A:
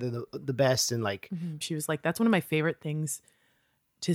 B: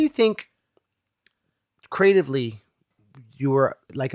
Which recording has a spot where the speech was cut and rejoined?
A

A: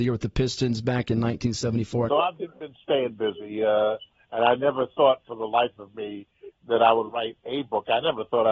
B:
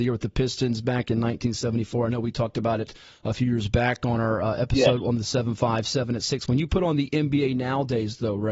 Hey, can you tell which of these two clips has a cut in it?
A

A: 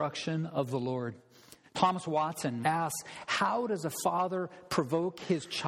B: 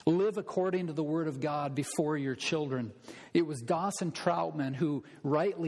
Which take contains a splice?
A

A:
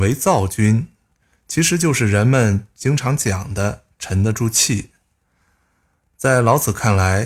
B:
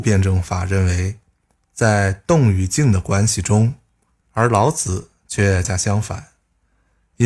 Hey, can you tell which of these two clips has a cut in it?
B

